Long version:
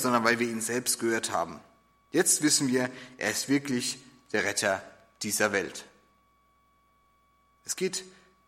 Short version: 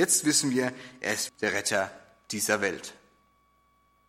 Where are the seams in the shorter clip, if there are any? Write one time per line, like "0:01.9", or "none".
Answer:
0:01.3